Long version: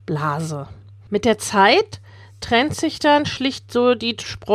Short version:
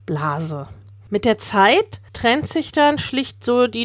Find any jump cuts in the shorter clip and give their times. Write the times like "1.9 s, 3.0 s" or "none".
2.1 s